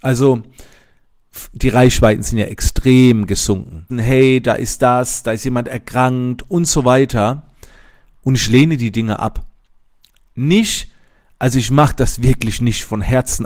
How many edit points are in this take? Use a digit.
1